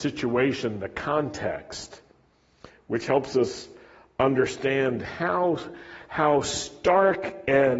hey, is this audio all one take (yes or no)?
yes